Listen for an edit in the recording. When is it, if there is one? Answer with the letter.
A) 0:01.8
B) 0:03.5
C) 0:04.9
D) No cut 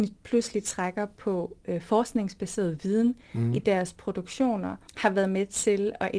C